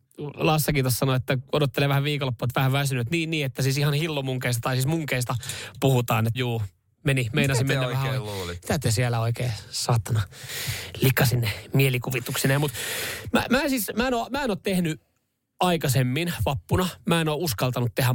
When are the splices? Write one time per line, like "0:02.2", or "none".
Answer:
0:06.3